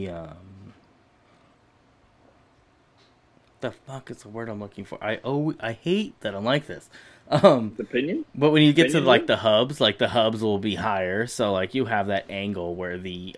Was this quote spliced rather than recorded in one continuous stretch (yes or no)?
no